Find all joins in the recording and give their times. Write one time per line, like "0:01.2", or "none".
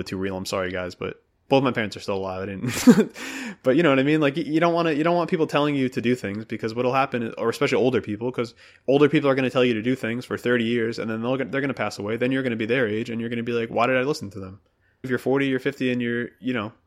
0:15.0

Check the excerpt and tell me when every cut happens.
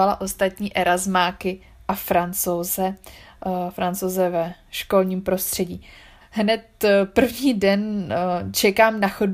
0:06.2

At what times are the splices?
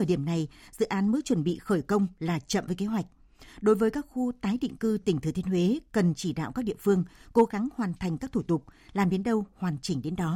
0:02.7

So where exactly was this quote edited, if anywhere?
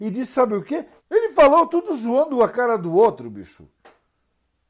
0:01.0

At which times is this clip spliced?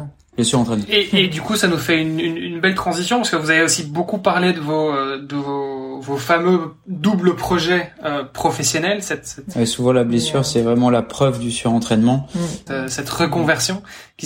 0:09.5
0:12.7

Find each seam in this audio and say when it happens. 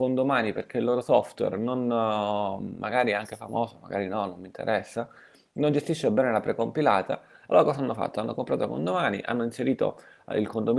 none

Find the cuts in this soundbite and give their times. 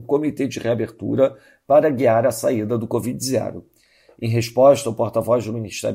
none

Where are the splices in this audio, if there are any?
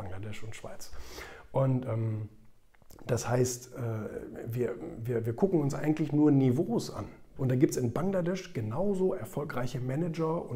0:07.4

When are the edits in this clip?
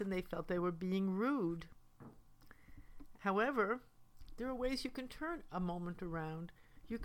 0:03.2

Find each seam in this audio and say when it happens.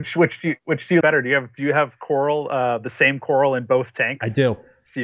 0:01.0

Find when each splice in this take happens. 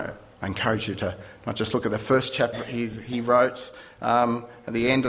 0:02.5

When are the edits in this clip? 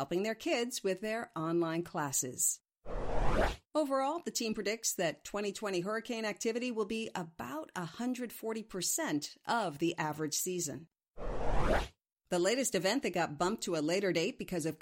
0:03.7

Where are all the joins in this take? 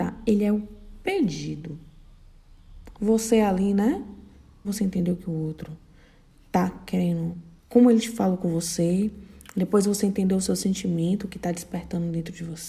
0:02.9
0:04.6
0:07.6

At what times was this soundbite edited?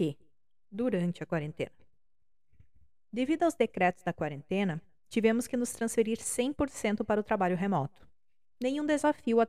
none

